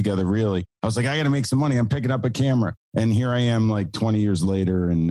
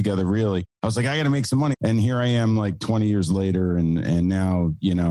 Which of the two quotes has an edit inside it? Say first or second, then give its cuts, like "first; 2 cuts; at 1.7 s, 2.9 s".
second; 1 cut; at 1.7 s